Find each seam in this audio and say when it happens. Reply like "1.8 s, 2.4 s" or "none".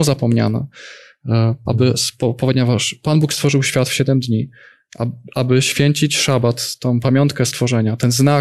1.7 s